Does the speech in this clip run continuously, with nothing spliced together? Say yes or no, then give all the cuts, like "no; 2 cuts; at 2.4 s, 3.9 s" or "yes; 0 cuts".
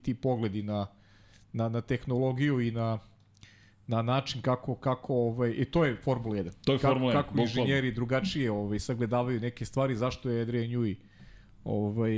yes; 0 cuts